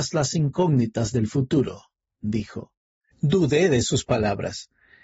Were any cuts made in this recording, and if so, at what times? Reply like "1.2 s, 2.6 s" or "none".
3.1 s